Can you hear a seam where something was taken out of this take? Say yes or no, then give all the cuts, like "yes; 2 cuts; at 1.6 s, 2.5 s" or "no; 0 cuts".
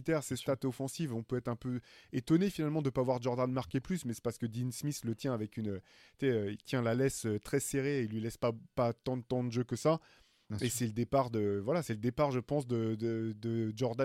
no; 0 cuts